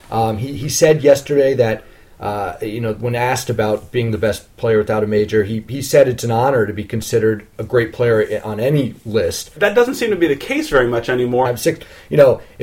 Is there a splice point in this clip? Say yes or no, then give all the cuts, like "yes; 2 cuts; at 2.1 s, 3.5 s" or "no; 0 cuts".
yes; 2 cuts; at 9.6 s, 11.4 s